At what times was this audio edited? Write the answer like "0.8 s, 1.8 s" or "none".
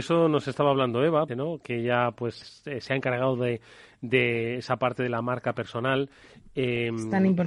1.3 s, 2.4 s